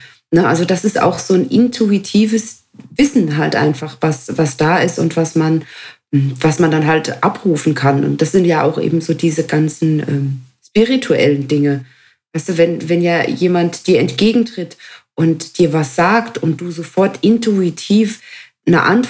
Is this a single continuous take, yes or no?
yes